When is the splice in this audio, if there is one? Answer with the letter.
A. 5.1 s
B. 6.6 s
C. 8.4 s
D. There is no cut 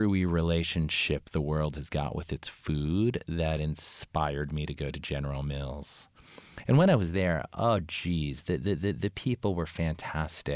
D